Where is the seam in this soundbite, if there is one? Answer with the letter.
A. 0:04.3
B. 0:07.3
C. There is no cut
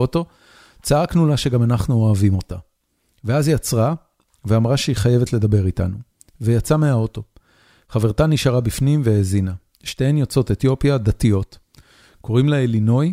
C